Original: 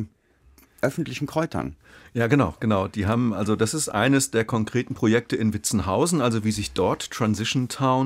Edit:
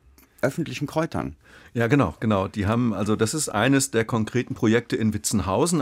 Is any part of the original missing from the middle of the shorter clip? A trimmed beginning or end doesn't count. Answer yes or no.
no